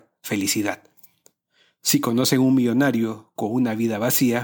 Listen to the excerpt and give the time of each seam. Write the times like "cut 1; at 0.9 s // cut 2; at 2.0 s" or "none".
none